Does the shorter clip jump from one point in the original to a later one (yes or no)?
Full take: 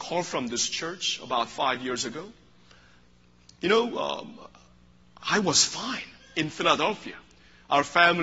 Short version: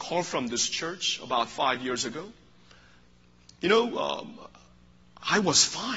no